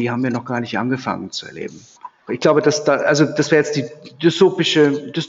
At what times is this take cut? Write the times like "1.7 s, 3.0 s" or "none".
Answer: 2.3 s